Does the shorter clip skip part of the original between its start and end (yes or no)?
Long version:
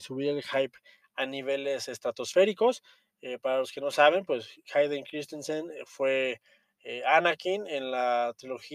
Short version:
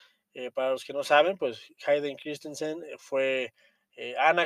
no